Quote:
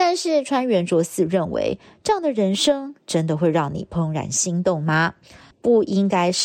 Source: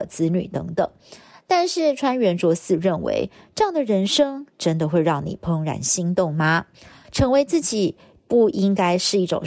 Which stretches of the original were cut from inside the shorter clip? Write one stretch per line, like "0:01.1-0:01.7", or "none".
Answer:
0:07.0-0:08.2